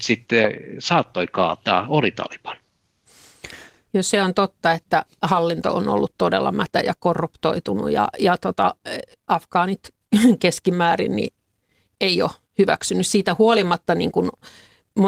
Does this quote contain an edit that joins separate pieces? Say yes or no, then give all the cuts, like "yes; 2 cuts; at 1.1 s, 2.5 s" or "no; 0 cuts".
no; 0 cuts